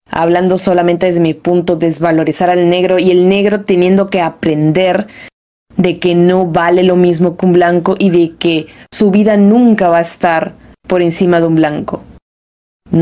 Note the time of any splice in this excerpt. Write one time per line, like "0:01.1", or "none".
none